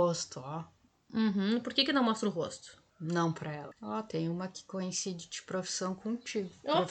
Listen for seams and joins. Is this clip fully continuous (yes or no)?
yes